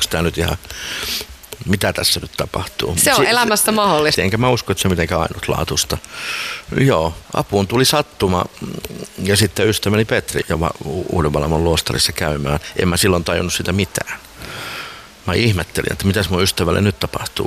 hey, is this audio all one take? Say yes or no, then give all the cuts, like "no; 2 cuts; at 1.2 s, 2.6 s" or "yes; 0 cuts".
no; 3 cuts; at 4.1 s, 7.3 s, 10.4 s